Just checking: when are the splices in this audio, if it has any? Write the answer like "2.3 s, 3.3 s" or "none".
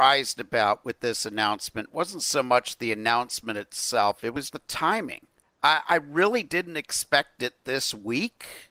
4.5 s

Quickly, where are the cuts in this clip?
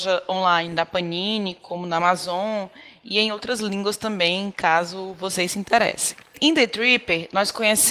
none

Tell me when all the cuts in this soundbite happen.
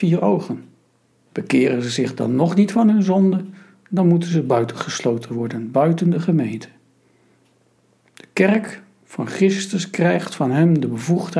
1.3 s

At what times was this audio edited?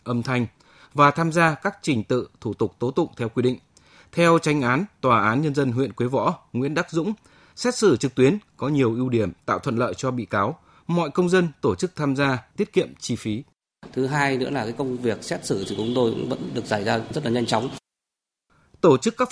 12.5 s, 13.9 s

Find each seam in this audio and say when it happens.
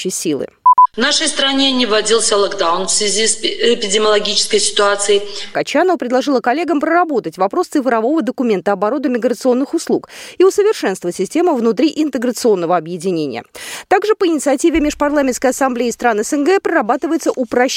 5.5 s

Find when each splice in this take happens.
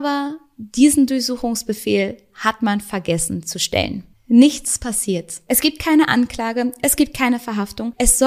4.1 s

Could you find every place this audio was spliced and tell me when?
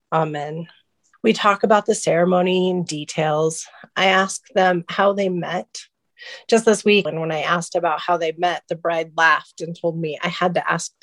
1.1 s, 7.1 s

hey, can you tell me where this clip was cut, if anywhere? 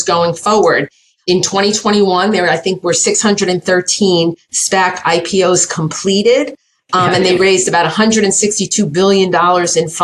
1.2 s

